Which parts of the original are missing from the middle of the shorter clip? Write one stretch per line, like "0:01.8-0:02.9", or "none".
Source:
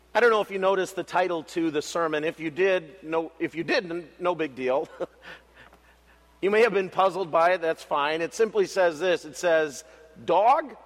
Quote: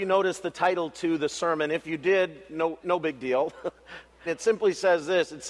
0:03.3-0:04.2
0:05.6-0:08.2